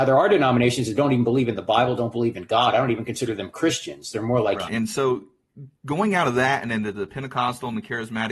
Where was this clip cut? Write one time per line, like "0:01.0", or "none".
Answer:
0:04.7